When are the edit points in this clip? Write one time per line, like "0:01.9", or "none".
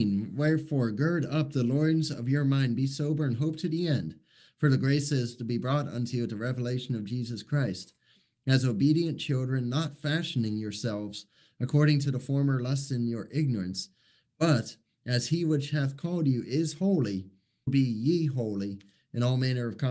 0:17.7